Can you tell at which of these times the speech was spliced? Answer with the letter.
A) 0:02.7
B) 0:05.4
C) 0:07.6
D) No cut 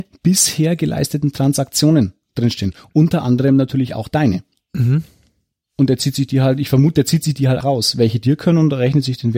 C